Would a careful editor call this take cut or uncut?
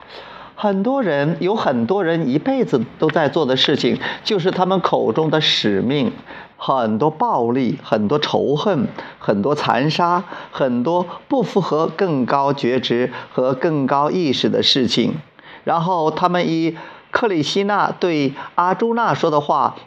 cut